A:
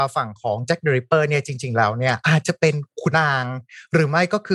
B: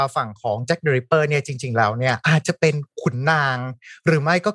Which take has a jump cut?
A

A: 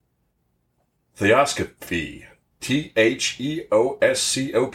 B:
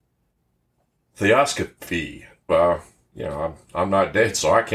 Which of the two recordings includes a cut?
B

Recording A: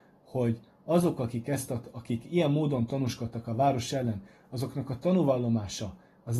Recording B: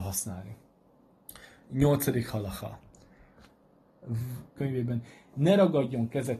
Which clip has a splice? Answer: B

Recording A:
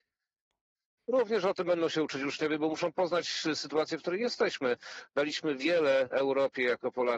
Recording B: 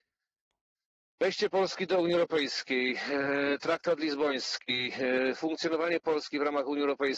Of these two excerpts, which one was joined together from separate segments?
A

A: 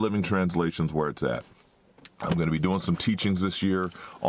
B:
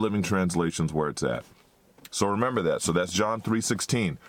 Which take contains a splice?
B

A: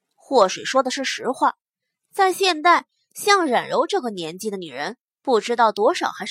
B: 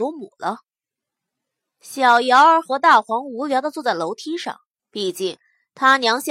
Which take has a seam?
B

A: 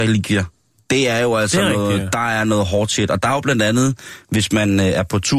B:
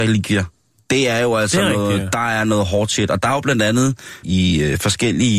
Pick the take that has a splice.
B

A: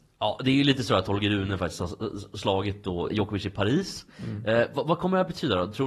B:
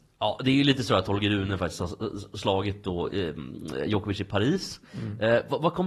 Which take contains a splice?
A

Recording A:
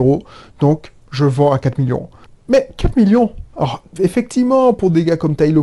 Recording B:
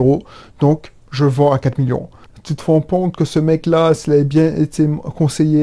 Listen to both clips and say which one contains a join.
B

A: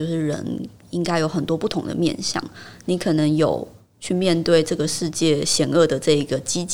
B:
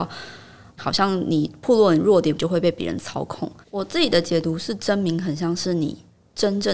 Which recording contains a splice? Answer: B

